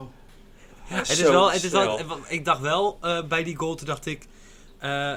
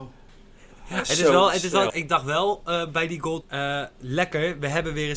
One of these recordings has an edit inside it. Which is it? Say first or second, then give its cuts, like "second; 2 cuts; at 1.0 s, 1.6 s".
second; 2 cuts; at 1.9 s, 3.4 s